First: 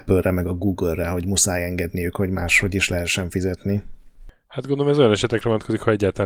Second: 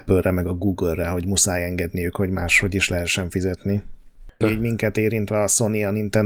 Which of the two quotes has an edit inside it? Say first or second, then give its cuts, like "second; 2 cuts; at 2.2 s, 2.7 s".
second; 1 cut; at 4.4 s